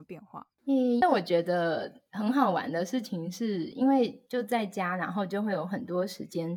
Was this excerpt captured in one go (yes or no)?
yes